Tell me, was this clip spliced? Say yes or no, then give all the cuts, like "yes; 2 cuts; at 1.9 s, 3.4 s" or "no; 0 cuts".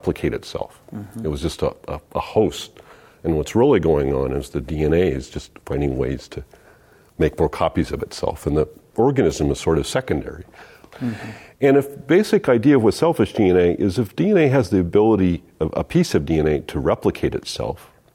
yes; 1 cut; at 10.9 s